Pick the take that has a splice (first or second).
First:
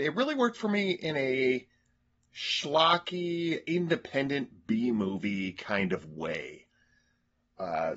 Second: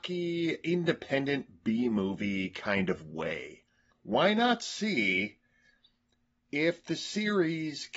second